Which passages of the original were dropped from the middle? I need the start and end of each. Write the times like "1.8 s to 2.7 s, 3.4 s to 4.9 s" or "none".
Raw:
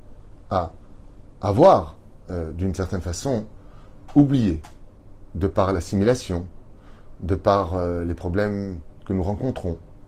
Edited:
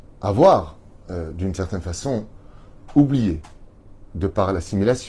none

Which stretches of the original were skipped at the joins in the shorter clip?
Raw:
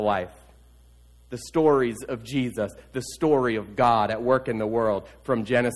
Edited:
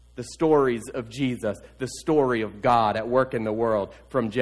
none

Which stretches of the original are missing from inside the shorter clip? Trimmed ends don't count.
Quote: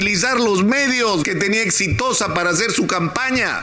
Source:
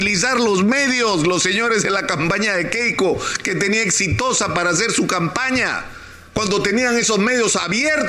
1.2 s to 3.4 s

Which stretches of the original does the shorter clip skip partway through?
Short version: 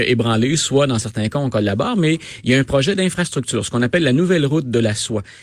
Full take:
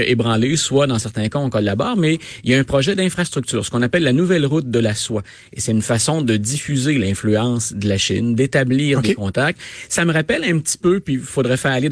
none

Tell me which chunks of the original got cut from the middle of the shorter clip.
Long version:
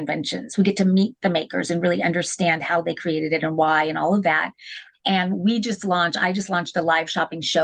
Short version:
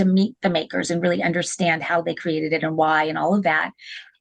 none

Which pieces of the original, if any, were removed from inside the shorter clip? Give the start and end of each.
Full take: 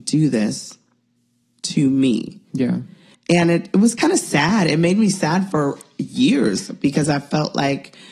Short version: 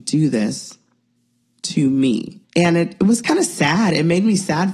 2.4 s to 3.2 s

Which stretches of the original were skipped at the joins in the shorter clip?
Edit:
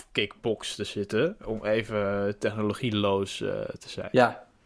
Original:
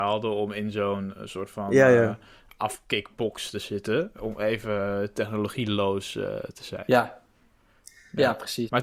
none

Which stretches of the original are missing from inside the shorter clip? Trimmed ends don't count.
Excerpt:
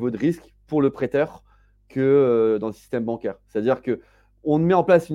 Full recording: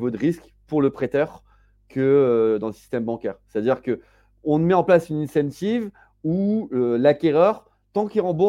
none

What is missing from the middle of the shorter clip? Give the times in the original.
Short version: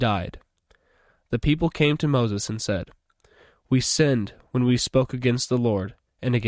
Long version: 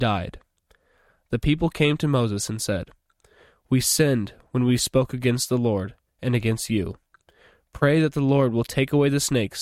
none

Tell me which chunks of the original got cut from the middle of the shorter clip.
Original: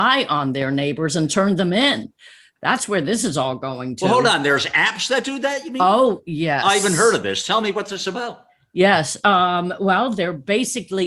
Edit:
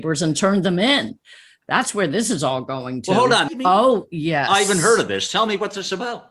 4.4 s to 5.6 s

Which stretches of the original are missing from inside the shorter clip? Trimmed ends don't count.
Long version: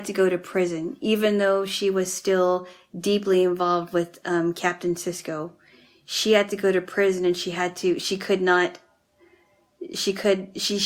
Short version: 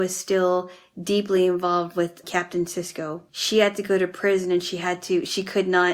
4.2 s to 4.5 s, 5.6 s to 6.0 s

